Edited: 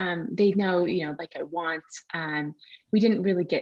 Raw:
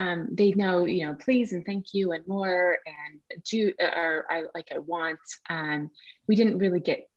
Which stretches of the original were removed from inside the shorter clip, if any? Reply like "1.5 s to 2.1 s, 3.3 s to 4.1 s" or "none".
1.2 s to 4.5 s